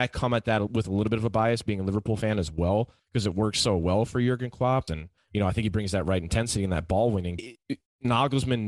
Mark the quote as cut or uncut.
cut